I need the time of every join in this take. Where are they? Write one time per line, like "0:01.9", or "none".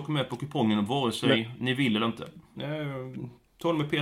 0:02.5